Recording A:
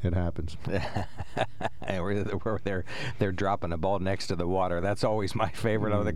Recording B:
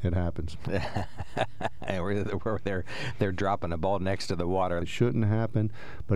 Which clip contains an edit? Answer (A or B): B